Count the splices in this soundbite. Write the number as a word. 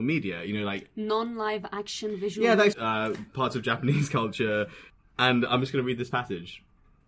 one